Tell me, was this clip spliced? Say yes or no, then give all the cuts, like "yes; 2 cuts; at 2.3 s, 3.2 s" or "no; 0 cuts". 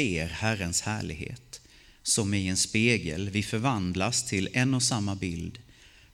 no; 0 cuts